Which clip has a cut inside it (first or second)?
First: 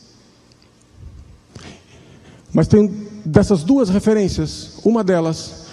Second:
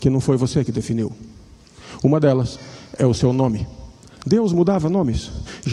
second